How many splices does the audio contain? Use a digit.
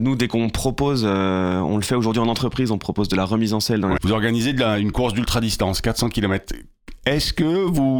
1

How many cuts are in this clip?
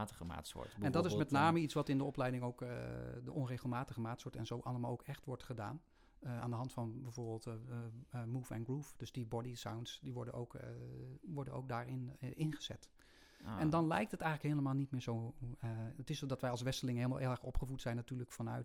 0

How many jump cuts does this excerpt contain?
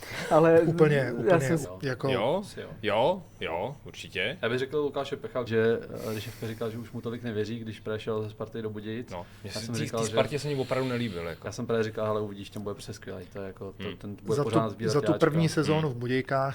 2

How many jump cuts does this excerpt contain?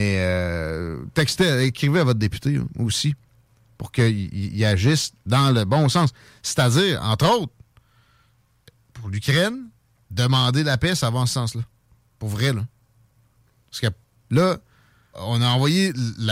1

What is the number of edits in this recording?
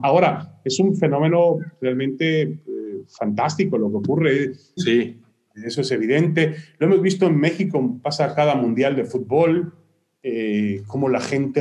1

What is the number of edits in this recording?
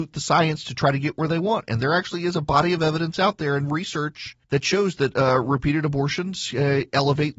1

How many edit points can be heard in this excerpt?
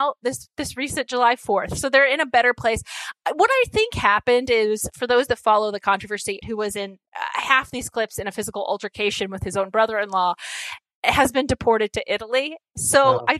1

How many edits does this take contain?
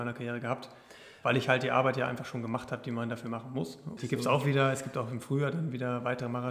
1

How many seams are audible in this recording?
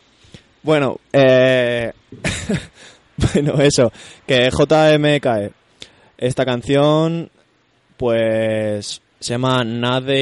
1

